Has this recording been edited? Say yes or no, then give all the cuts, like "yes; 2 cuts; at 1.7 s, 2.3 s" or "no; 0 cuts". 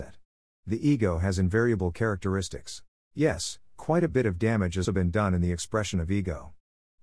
yes; 2 cuts; at 3.1 s, 4.9 s